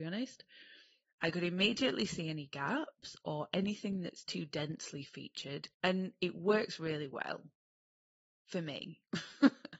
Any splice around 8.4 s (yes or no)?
no